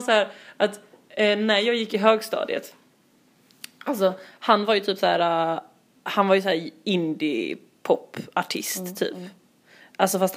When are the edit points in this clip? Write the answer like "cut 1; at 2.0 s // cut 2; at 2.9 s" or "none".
none